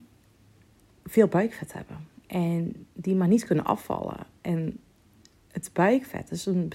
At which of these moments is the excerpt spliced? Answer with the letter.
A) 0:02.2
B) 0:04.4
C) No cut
A